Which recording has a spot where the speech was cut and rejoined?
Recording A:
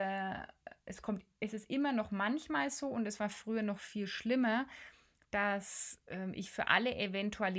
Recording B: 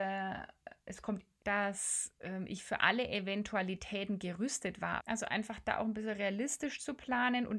B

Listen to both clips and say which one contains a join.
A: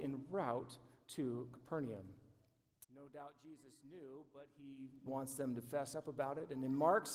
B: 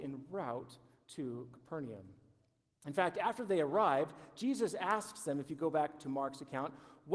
A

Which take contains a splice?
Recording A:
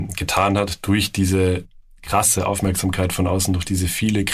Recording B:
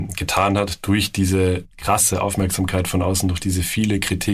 B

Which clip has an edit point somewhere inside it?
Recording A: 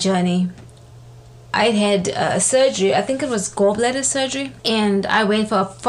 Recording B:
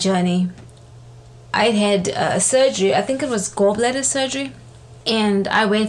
A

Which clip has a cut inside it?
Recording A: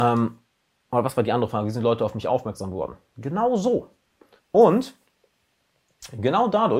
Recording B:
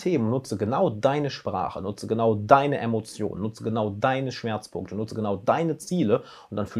A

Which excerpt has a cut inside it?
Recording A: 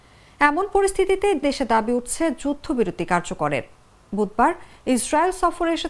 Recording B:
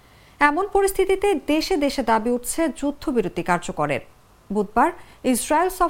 A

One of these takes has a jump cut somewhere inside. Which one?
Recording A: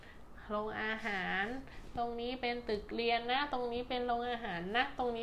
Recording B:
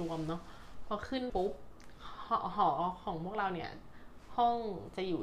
B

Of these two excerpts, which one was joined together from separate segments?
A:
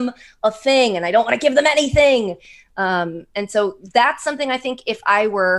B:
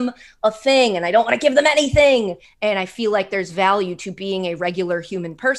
B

